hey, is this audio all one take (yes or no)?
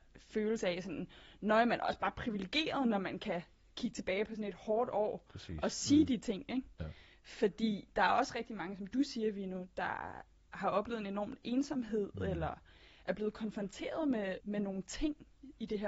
no